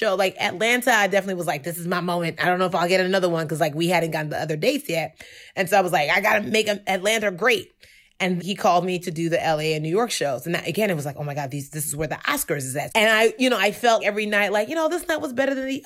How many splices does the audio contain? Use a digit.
3